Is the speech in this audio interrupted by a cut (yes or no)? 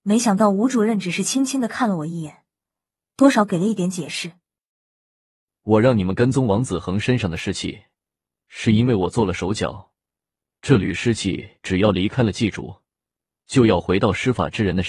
no